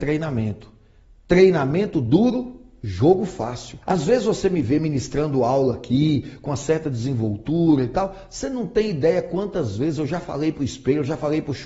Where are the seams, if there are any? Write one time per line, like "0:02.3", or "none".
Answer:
0:03.8